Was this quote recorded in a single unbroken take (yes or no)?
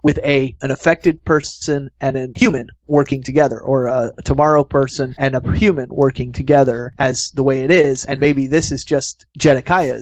yes